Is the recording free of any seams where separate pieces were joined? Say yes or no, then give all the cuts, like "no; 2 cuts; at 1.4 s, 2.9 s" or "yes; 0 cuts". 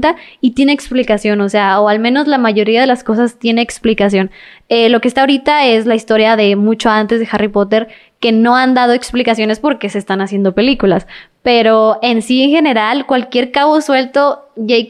yes; 0 cuts